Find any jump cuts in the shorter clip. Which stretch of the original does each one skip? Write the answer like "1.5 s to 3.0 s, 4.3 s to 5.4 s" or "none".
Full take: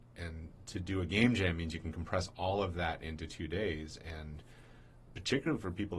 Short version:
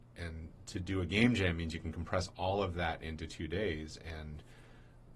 none